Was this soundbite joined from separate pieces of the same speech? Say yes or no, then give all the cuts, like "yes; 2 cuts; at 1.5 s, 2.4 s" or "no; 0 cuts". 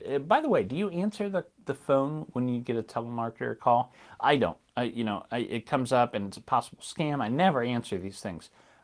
no; 0 cuts